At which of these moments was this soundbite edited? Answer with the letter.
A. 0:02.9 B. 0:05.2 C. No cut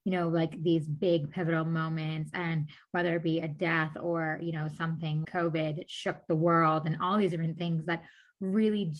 B